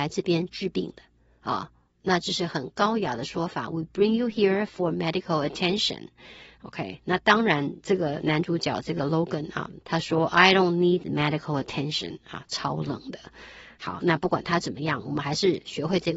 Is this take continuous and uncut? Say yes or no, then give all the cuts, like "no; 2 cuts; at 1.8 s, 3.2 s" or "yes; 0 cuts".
no; 1 cut; at 9.8 s